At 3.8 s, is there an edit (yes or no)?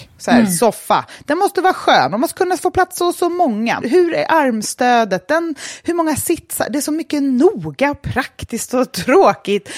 yes